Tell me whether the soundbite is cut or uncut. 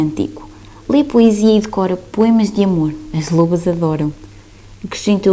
uncut